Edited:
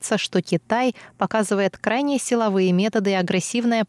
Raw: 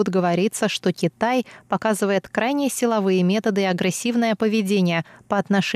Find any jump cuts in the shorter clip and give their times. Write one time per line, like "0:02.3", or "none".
none

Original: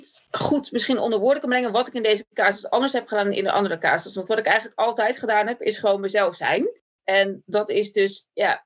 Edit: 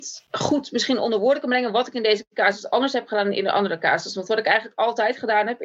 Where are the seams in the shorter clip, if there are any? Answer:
none

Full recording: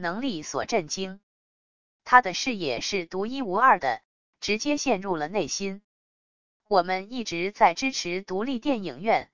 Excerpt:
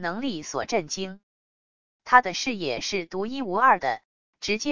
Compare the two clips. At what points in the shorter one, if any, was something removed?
none

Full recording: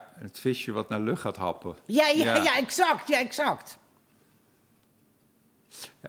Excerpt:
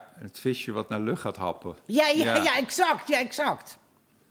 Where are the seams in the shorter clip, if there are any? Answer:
none

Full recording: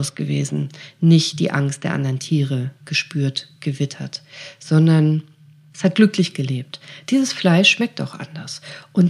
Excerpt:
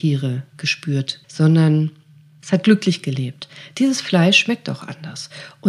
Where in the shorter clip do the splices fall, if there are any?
0:01.2

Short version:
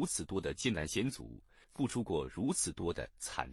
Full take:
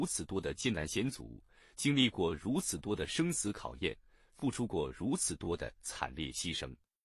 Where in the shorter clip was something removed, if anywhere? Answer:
0:01.6

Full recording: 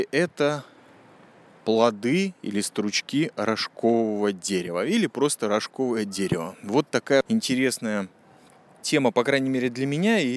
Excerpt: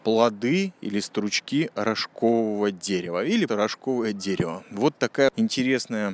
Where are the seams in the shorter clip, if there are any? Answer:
0:03.5

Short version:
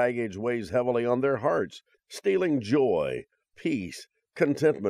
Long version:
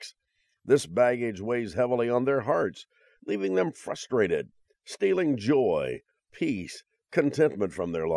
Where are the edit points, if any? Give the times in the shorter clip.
0:01.9

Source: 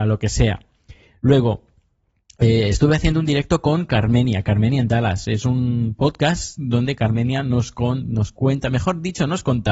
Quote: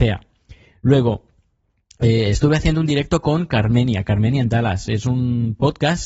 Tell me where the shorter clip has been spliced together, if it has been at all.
none

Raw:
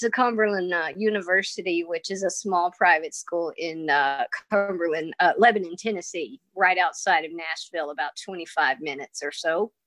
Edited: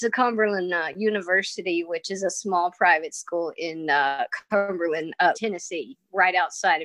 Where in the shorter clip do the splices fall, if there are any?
0:05.3

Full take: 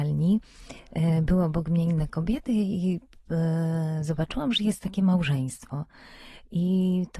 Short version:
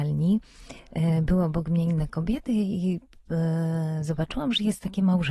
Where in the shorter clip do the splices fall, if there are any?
none

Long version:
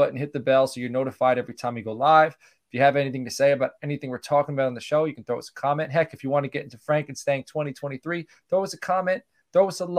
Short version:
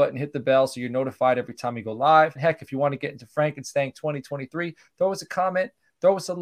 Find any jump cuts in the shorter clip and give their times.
0:02.4

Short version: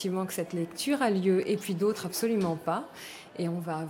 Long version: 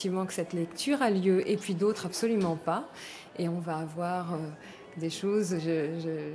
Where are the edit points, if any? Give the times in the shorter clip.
none

